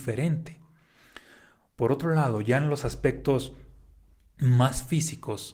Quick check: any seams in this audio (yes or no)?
no